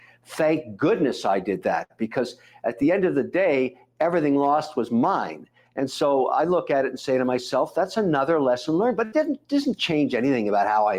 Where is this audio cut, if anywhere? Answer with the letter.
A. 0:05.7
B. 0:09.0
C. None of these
C